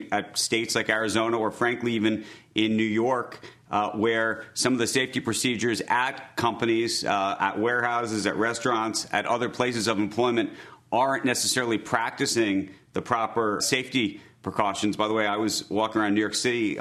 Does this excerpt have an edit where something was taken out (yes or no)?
yes